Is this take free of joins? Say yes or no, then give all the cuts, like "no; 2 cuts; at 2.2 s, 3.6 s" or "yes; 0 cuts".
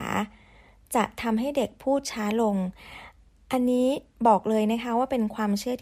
yes; 0 cuts